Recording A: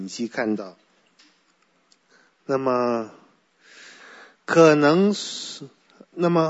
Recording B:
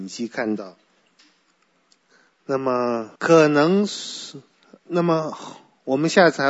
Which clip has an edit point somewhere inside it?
B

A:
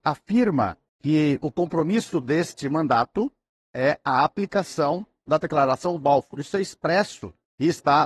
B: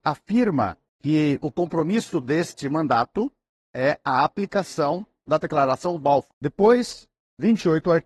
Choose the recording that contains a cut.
B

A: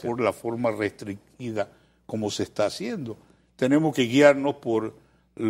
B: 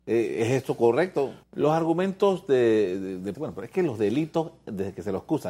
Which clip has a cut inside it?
B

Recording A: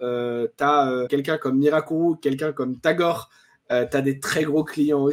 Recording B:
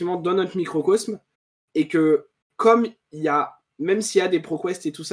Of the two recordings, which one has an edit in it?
A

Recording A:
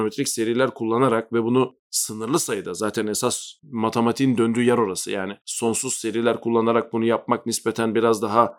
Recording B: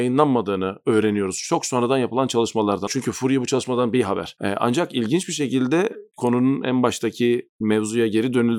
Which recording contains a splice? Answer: B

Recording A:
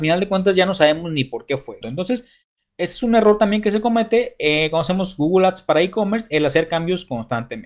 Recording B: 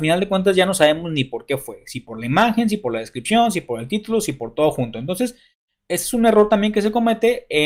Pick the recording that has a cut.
A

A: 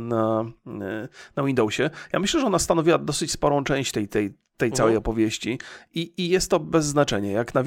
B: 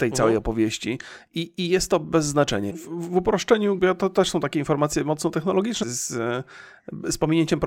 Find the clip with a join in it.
B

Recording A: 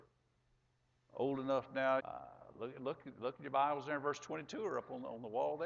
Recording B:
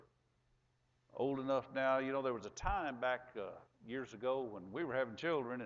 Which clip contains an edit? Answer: A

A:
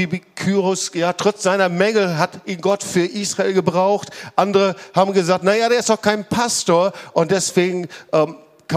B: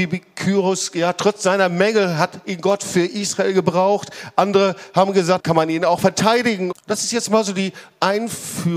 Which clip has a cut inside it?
B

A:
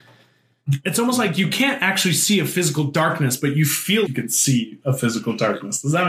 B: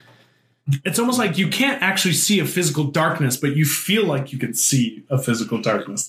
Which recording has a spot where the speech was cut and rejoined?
A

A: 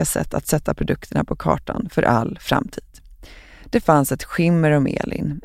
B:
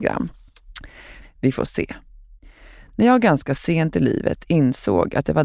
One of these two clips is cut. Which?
B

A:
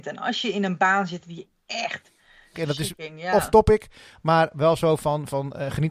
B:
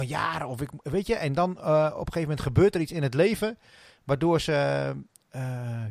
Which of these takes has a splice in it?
A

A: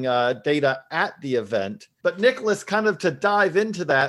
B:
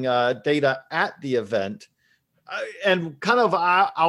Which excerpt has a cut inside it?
A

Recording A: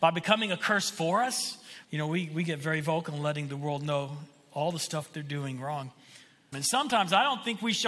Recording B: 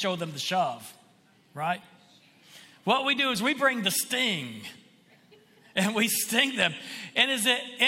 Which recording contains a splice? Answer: A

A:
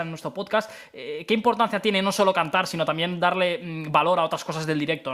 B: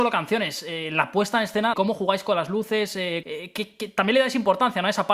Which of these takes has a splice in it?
B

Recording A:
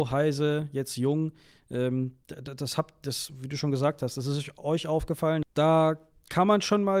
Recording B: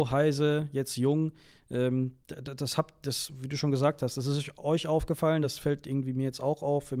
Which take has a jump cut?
A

